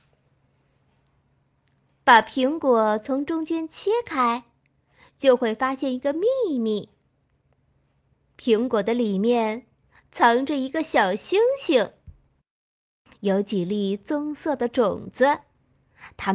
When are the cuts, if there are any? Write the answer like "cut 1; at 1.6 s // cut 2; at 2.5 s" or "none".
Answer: cut 1; at 13.1 s